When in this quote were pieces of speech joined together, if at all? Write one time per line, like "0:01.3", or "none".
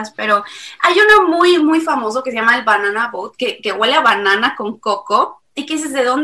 none